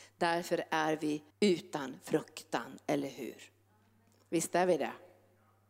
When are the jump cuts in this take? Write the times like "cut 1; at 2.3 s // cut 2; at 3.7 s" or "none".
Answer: cut 1; at 1.3 s